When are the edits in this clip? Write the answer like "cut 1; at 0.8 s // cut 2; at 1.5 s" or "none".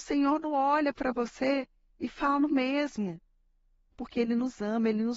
cut 1; at 3.9 s